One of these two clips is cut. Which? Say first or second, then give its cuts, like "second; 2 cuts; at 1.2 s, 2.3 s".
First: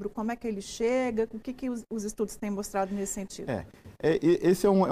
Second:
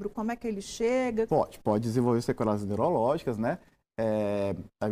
second; 1 cut; at 1.3 s